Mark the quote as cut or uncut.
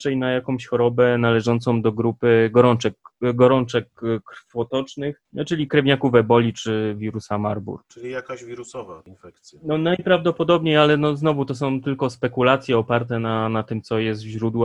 uncut